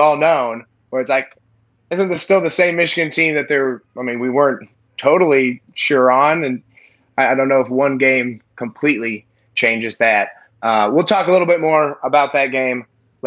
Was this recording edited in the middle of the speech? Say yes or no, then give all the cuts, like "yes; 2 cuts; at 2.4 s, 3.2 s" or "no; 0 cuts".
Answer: no; 0 cuts